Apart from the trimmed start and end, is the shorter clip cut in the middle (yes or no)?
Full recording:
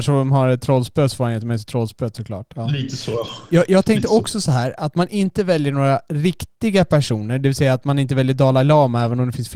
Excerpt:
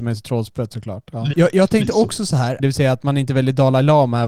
yes